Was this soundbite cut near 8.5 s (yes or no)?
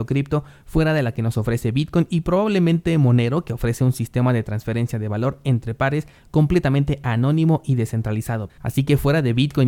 yes